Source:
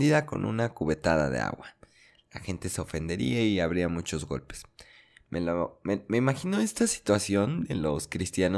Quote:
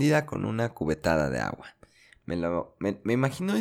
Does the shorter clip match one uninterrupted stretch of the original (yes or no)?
no